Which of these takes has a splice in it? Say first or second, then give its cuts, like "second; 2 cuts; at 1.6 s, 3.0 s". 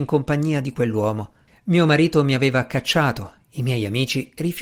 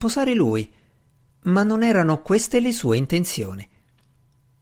first; 1 cut; at 1.5 s